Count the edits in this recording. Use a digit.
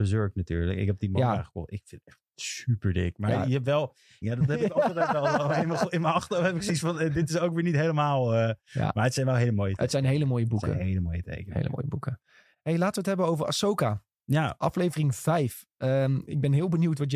1